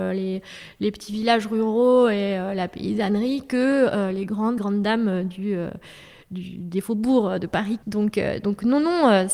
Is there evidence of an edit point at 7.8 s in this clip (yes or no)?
yes